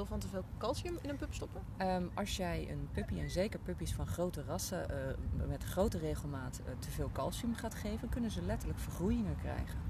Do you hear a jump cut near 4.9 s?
no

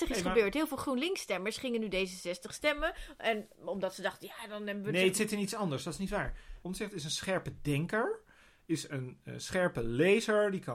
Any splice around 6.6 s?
yes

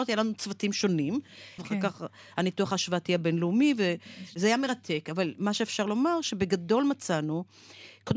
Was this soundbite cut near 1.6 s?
yes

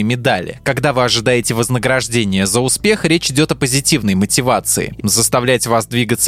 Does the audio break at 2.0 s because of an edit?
no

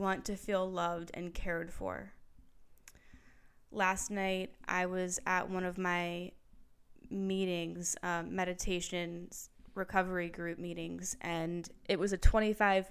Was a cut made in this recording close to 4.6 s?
no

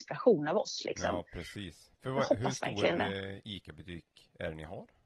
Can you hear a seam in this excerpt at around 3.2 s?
no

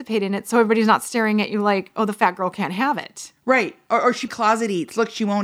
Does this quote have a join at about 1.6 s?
no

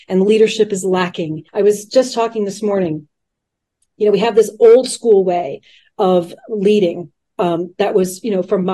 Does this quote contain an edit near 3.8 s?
no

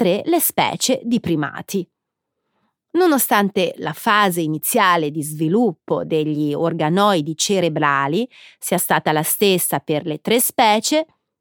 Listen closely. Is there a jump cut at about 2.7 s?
no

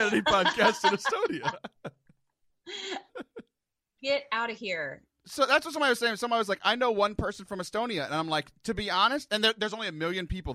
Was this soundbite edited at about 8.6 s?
no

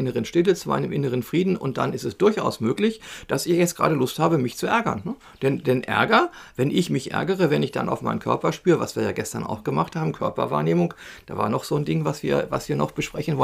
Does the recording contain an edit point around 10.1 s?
no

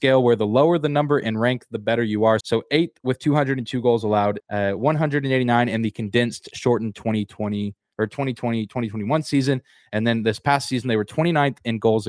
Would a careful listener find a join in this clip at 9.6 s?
no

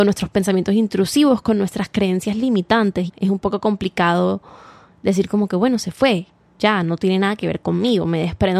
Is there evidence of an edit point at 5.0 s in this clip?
no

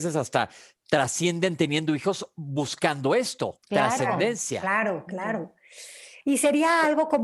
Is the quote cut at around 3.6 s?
yes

